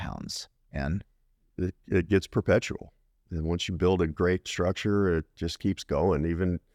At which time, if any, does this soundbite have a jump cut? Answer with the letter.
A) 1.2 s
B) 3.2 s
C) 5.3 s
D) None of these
D